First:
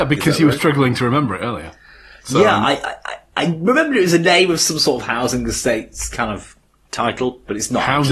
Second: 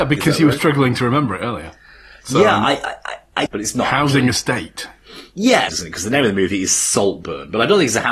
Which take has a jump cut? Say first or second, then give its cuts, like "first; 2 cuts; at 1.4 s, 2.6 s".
second; 2 cuts; at 3.5 s, 5.7 s